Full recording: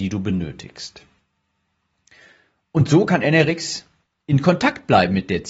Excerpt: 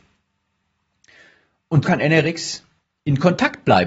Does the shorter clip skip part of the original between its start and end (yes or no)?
yes